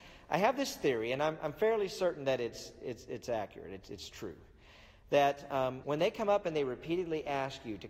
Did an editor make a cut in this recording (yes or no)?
yes